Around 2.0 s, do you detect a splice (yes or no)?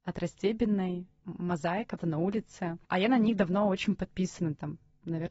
yes